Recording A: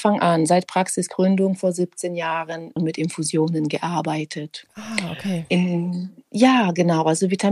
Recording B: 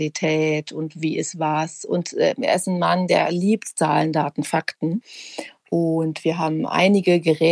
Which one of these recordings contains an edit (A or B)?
A